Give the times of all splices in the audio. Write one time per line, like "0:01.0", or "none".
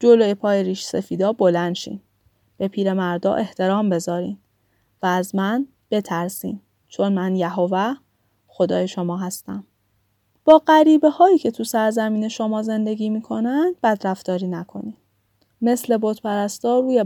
0:15.5